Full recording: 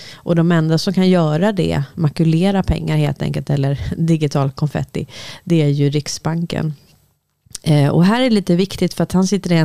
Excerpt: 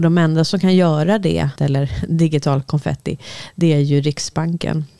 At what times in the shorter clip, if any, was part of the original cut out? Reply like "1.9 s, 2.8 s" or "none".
1.6 s